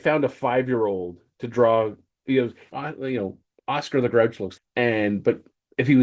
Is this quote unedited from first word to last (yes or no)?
no